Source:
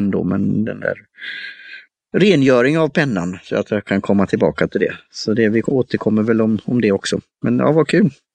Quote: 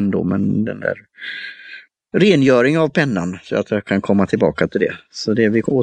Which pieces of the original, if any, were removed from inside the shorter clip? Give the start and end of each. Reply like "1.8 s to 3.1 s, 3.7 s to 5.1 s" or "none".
none